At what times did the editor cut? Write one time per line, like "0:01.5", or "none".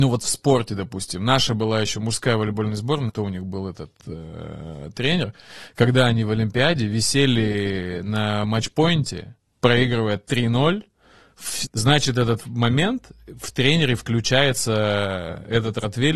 0:03.1
0:11.7